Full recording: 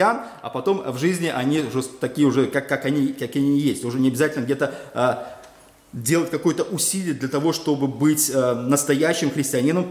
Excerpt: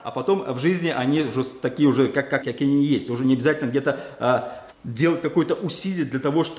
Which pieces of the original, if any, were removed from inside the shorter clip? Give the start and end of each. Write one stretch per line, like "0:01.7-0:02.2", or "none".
0:02.8-0:03.2
0:05.5-0:05.8